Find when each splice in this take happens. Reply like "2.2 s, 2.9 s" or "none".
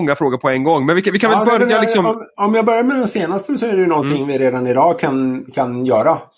none